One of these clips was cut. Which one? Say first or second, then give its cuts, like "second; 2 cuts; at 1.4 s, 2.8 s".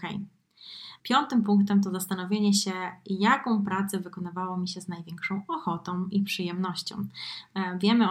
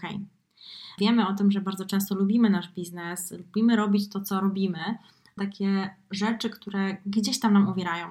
second; 2 cuts; at 1.0 s, 5.4 s